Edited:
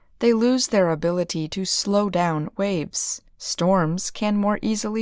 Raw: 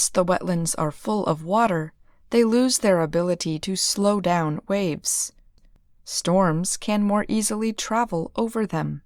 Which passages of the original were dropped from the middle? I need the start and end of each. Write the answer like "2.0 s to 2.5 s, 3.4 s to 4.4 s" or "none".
5.4 s to 5.9 s